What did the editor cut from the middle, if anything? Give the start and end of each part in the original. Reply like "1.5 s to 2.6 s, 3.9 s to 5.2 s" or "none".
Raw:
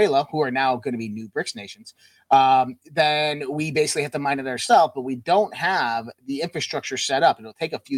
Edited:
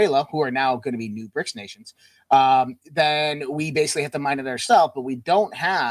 none